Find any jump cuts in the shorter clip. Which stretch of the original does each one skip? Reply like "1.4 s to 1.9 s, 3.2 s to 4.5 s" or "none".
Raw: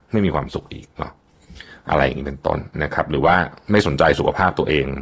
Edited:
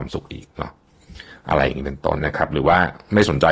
2.6 s to 2.8 s